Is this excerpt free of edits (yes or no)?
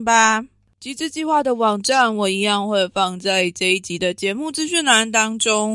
yes